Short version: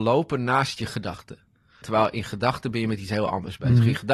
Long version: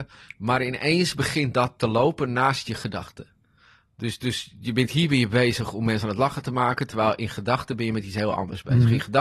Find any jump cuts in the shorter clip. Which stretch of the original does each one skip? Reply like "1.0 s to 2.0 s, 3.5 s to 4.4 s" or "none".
3.7 s to 6.9 s